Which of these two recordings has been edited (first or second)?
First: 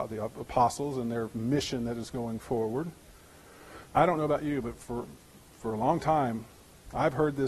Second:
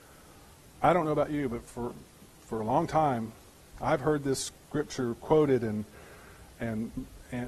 first